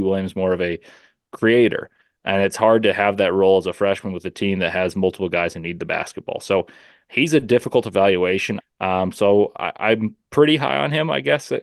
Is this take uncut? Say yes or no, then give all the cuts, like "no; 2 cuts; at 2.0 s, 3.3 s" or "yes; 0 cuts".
no; 1 cut; at 8.6 s